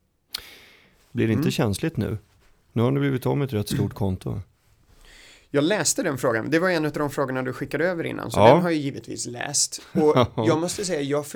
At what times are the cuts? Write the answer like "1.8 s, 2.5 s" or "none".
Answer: 1.1 s